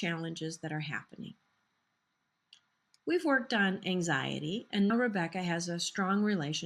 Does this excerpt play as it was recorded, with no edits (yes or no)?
no